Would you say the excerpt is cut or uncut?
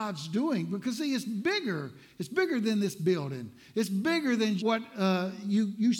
cut